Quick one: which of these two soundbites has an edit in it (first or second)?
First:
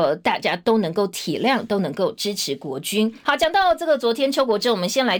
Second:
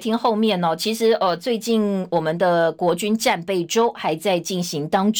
first